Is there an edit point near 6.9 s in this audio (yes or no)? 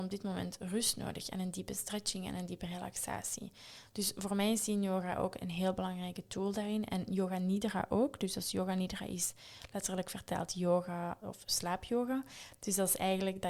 no